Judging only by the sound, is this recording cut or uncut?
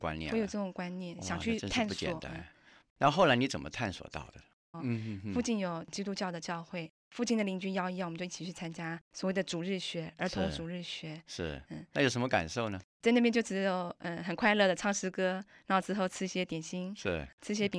cut